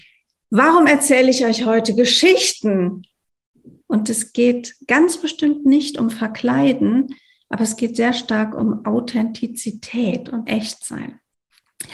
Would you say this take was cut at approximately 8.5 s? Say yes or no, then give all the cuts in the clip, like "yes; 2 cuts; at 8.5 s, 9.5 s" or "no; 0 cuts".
no; 2 cuts; at 3.8 s, 10.5 s